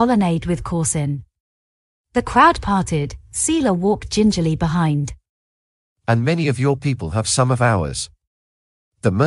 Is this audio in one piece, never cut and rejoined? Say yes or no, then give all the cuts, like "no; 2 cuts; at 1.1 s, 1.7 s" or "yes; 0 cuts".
yes; 0 cuts